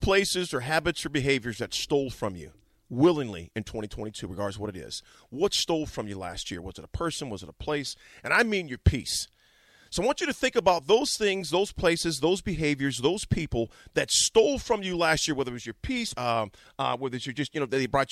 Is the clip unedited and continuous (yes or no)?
no